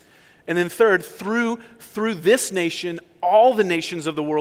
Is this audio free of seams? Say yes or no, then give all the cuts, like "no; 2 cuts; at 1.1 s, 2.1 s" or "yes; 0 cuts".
yes; 0 cuts